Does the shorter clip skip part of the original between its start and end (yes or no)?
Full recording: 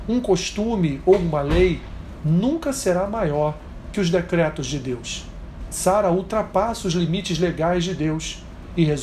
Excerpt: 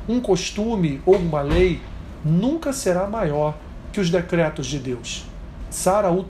no